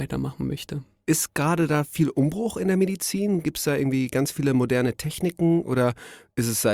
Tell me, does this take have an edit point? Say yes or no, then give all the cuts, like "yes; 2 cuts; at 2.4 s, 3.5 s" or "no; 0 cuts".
no; 0 cuts